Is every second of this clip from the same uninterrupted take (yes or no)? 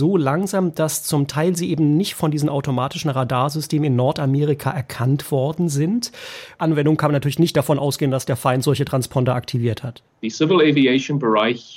no